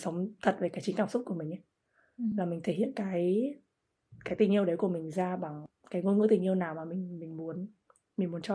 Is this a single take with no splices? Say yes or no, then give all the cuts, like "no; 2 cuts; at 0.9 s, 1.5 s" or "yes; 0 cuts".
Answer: yes; 0 cuts